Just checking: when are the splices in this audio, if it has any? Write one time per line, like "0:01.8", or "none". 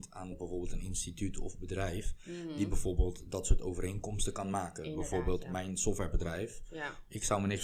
none